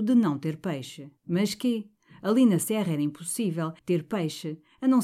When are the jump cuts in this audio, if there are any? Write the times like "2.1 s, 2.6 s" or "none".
1.2 s, 3.8 s